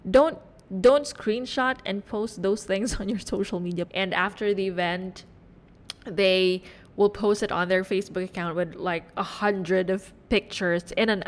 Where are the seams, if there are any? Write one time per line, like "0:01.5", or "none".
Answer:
0:03.9